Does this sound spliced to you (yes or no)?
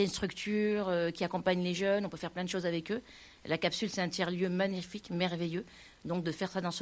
no